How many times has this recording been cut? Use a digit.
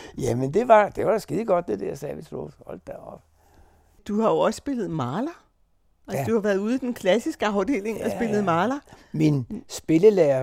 0